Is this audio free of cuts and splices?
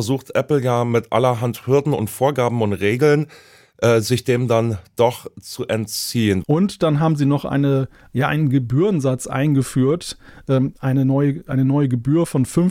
no; 1 cut; at 6.4 s

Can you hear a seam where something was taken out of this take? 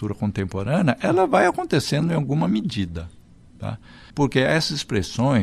yes; 1 cut; at 4.1 s

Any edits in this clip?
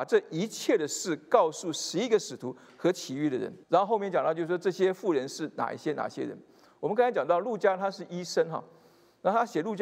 yes; 1 cut; at 3.6 s

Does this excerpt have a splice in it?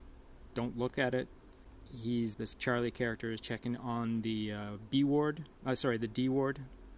yes; 1 cut; at 2.3 s

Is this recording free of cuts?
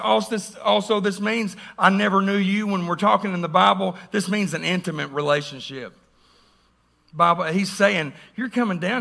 yes; 0 cuts

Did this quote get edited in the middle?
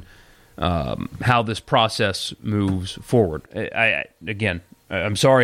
yes; 1 cut; at 3.4 s

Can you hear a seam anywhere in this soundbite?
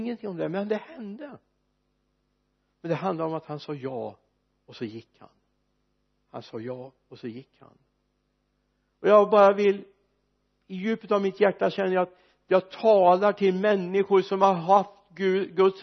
no; 0 cuts

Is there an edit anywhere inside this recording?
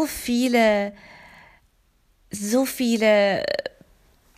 no; 0 cuts

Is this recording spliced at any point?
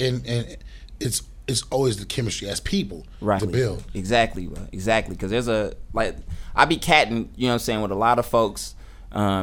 yes; 1 cut; at 3.4 s

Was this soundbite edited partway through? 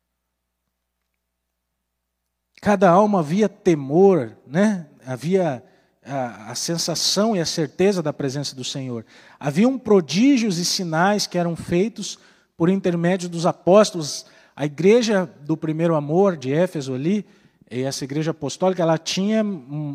no; 0 cuts

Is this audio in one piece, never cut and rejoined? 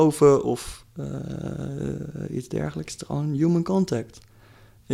yes; 0 cuts

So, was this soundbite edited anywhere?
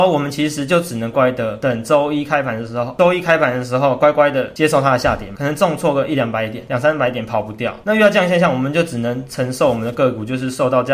yes; 1 cut; at 1.1 s

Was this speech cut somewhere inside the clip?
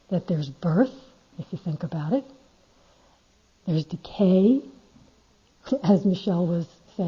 yes; 1 cut; at 1.3 s

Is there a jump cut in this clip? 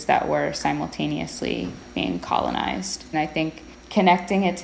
yes; 1 cut; at 3.1 s

